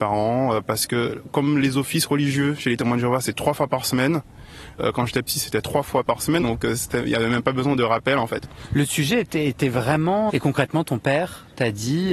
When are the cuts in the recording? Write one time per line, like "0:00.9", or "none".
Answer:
0:06.4
0:10.3